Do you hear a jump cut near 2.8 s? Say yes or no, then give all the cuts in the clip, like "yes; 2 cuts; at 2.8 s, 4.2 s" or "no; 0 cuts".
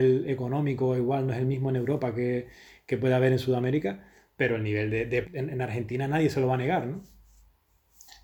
no; 1 cut; at 5.2 s